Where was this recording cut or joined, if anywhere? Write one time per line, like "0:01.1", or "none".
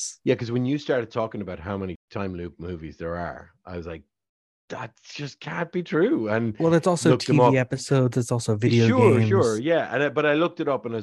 none

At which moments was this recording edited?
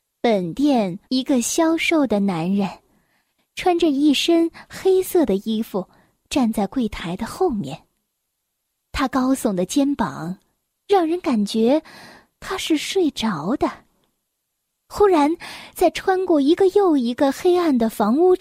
0:01.1
0:14.7

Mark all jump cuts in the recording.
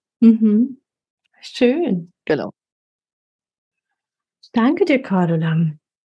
none

